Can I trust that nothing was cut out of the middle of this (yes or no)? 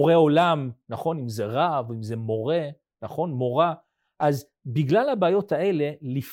yes